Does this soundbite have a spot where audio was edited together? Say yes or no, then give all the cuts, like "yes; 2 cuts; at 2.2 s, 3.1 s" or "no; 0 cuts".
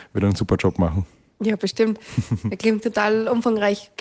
no; 0 cuts